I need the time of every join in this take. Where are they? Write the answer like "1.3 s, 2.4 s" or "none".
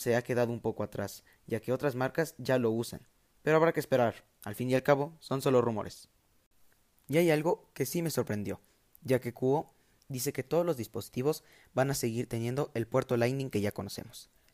none